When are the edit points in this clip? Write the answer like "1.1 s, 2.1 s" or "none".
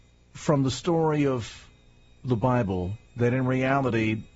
3.1 s